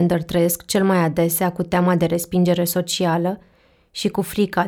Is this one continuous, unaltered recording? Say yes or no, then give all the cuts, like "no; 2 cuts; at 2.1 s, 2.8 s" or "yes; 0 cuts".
yes; 0 cuts